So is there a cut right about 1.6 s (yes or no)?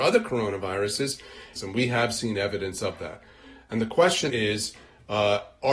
yes